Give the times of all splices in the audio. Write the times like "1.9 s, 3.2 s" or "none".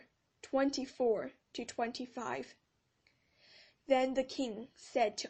none